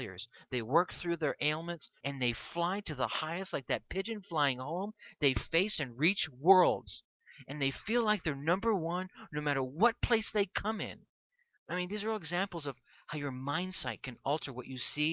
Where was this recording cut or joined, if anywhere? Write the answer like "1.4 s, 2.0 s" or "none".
2.0 s